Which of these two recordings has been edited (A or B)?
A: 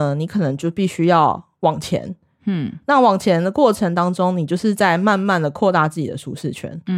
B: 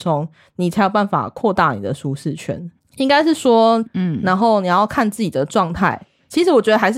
B